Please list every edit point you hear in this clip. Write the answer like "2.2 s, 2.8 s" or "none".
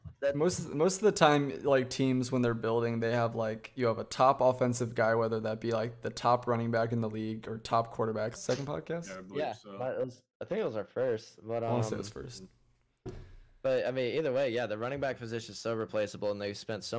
8.4 s